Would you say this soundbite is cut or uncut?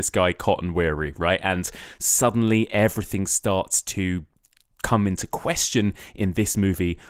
uncut